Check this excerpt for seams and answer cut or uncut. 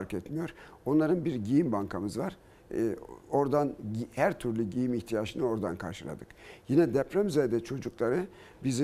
uncut